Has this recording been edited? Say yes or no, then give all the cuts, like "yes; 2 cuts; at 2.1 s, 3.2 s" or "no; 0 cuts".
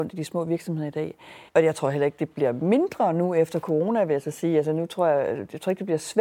yes; 1 cut; at 1.5 s